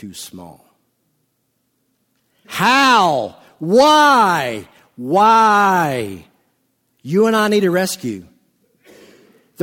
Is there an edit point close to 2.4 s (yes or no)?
yes